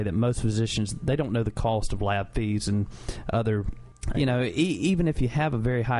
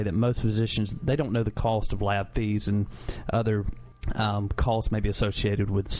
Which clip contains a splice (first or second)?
first